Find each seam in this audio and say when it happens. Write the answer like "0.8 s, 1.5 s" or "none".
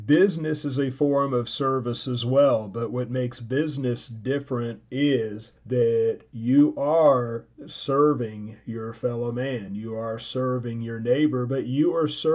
none